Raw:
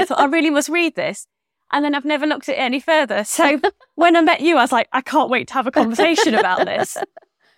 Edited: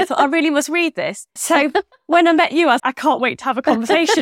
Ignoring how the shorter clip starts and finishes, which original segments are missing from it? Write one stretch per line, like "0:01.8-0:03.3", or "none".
0:01.4-0:03.2
0:04.7-0:04.9